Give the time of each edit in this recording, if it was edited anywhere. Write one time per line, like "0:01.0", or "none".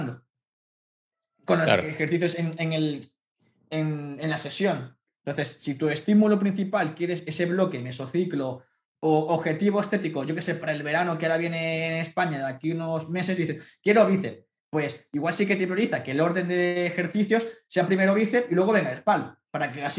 none